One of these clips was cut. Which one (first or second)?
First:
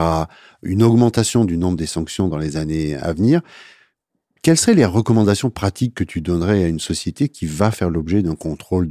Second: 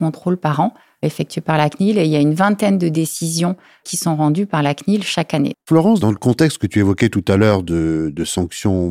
second